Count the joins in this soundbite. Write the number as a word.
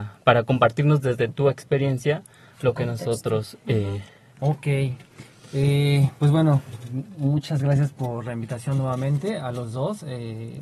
one